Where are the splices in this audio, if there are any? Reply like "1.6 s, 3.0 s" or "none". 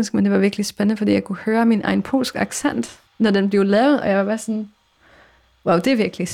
3.1 s